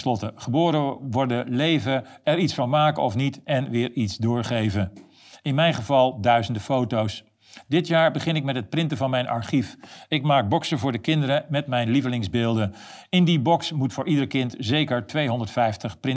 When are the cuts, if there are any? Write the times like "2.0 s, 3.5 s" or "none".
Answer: none